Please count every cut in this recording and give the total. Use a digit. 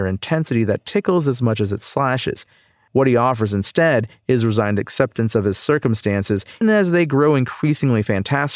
1